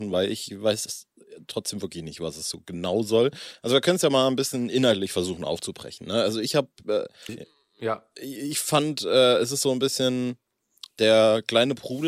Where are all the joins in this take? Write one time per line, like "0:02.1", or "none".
0:07.3